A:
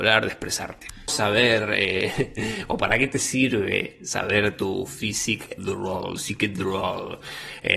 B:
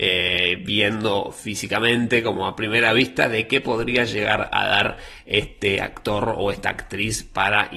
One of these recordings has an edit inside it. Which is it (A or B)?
A